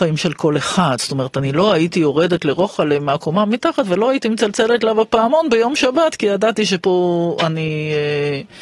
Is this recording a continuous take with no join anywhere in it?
yes; 0 cuts

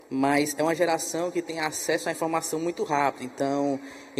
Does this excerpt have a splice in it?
no; 0 cuts

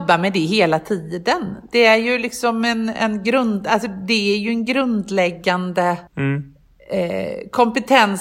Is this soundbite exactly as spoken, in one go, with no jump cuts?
no; 2 cuts; at 2.9 s, 6.1 s

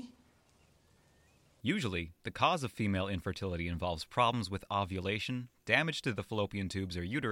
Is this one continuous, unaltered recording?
no; 1 cut; at 1.6 s

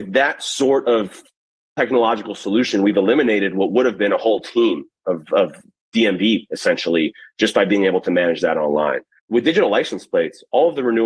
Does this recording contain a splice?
yes; 1 cut; at 9.2 s

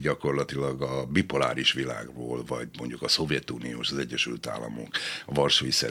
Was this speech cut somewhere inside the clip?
no; 0 cuts

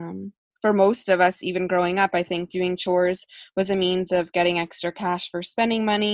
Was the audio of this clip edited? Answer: no; 0 cuts

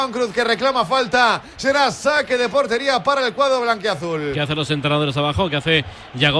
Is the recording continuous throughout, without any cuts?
yes; 0 cuts

